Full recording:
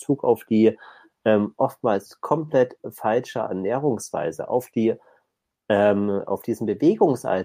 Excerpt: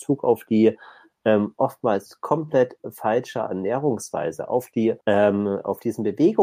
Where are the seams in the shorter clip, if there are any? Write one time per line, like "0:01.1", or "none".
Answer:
0:05.0